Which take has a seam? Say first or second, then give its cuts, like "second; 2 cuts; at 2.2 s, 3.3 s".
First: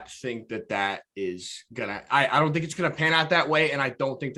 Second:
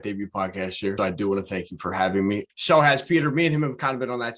second; 2 cuts; at 1.0 s, 2.5 s